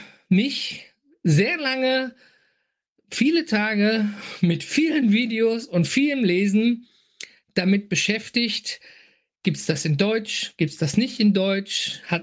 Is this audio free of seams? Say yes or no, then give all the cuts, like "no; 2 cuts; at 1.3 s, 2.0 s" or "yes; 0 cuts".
yes; 0 cuts